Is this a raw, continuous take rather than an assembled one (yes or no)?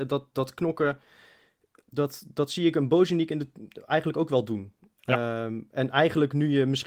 yes